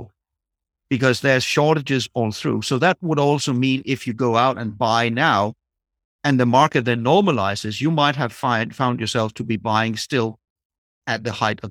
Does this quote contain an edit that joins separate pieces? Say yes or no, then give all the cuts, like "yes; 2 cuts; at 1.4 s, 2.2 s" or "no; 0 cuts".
no; 0 cuts